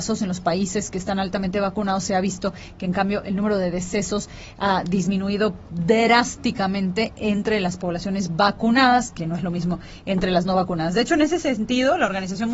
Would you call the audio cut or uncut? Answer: uncut